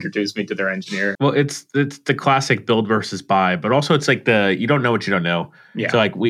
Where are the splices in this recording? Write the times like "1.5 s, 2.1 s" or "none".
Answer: 1.1 s